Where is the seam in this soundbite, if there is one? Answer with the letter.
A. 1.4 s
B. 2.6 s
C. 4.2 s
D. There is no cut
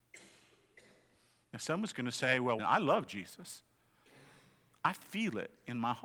B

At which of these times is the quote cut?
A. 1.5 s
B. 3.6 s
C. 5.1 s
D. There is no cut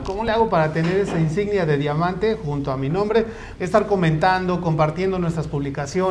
B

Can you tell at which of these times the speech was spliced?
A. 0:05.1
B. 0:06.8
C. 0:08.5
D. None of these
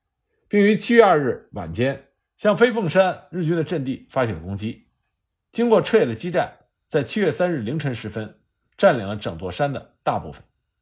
D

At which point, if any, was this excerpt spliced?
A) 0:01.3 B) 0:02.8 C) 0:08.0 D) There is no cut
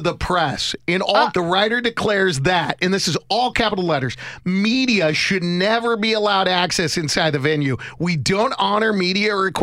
A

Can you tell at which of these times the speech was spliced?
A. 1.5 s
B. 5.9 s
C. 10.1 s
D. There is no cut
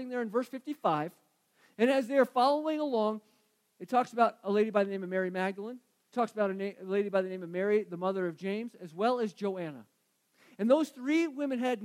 D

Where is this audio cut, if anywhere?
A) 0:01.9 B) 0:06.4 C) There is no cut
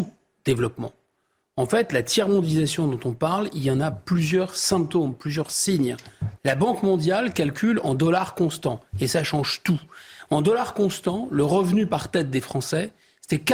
B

